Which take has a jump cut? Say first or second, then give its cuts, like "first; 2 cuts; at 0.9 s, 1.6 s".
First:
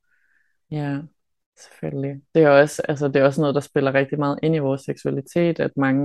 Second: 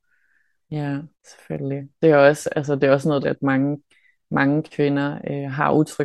second; 2 cuts; at 1.1 s, 3.2 s